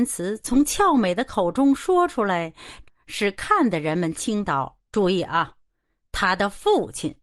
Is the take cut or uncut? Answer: cut